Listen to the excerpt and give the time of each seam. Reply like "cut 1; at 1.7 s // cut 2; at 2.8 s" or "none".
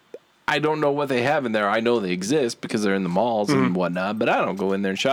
none